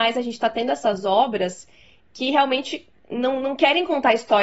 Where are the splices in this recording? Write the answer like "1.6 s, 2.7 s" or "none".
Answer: none